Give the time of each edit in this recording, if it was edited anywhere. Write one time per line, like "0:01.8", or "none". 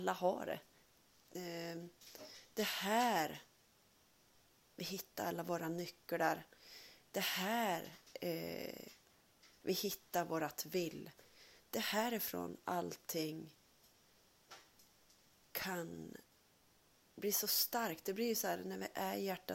0:01.2